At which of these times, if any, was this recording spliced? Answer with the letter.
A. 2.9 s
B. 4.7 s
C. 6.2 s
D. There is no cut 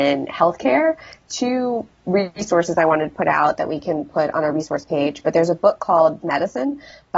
C